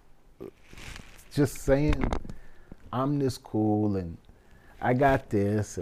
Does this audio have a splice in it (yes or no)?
no